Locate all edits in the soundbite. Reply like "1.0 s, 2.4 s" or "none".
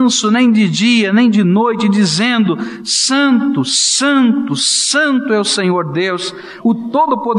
none